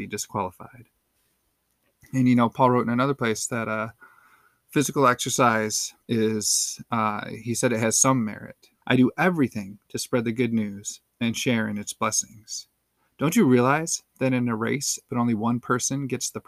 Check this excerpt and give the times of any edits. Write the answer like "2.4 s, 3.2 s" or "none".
6.0 s, 8.8 s, 15.1 s